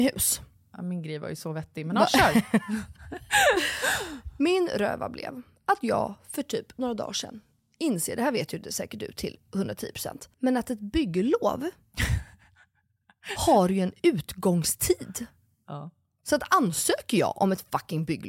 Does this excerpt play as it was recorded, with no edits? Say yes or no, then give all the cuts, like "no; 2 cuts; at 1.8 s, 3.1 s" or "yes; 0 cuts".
no; 1 cut; at 10.3 s